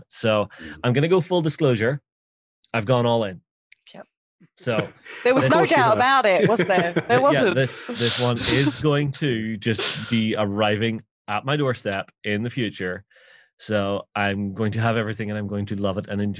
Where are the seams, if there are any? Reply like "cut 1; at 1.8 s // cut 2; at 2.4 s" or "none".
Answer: none